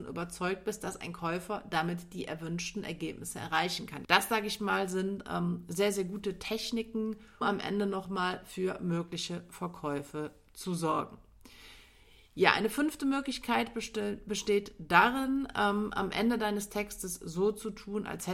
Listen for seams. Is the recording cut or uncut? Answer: cut